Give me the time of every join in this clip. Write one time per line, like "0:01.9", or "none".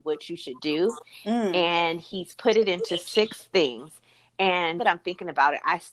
0:04.8